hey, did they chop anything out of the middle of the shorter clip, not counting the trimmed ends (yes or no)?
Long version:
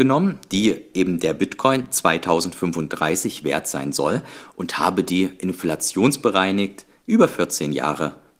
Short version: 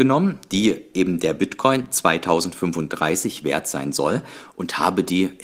no